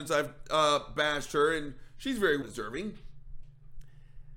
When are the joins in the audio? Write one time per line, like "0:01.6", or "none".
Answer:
0:02.4